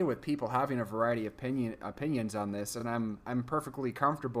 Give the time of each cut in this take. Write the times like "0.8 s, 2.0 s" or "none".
none